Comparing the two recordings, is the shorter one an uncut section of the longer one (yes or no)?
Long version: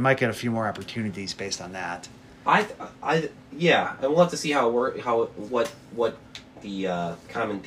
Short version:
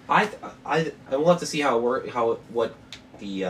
no